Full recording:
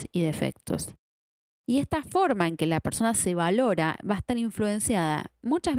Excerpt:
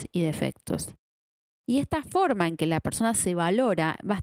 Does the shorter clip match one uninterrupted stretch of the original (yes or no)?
yes